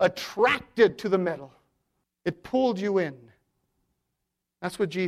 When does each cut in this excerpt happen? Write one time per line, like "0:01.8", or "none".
none